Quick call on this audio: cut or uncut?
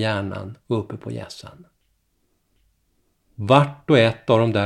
uncut